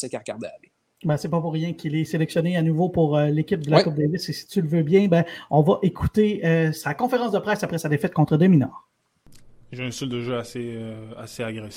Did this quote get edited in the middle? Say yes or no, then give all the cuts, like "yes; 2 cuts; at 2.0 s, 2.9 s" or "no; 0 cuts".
no; 0 cuts